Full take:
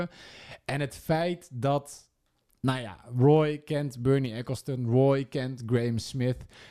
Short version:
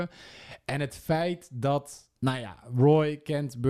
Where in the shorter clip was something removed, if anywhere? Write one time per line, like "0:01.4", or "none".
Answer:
0:02.2